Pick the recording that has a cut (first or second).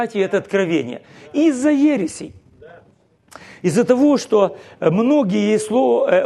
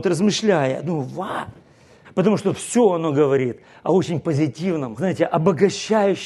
second